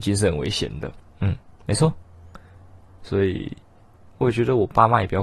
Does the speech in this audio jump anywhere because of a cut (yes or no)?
yes